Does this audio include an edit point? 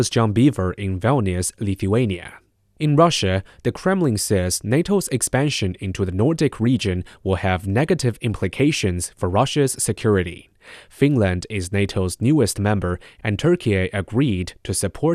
no; 0 cuts

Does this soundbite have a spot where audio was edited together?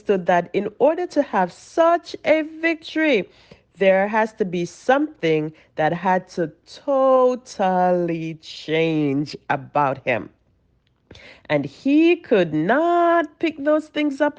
no; 0 cuts

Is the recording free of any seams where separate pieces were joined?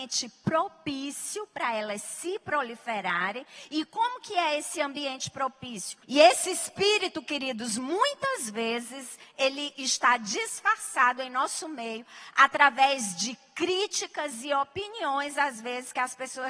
no; 1 cut; at 6.0 s

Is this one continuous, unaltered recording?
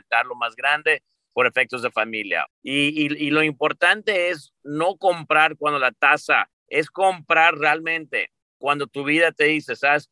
no; 2 cuts; at 2.5 s, 6.5 s

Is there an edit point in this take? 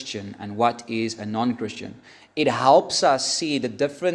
no; 0 cuts

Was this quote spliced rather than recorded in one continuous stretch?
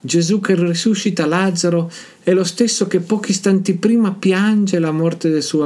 no; 0 cuts

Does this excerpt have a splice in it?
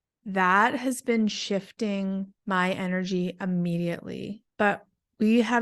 yes; 2 cuts; at 2.4 s, 4.5 s

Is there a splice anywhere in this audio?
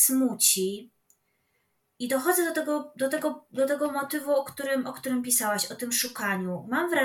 no; 0 cuts

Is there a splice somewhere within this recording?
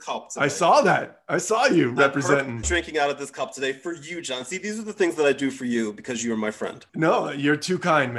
yes; 2 cuts; at 2.6 s, 6.9 s

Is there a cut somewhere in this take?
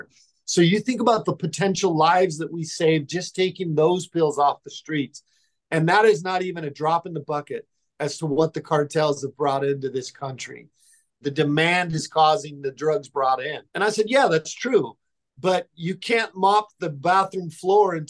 yes; 2 cuts; at 11.2 s, 13.7 s

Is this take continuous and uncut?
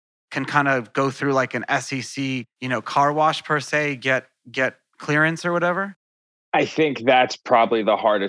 no; 1 cut; at 2.5 s

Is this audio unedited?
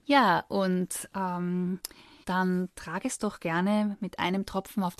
no; 1 cut; at 2.2 s

